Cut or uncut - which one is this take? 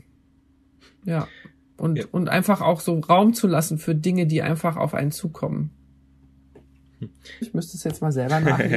cut